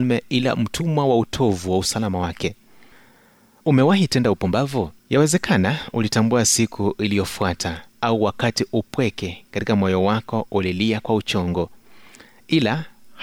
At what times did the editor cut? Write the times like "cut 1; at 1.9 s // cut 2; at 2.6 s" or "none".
cut 1; at 5.0 s